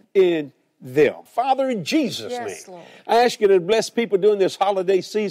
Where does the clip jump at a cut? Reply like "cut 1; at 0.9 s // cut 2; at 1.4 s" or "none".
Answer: cut 1; at 1.3 s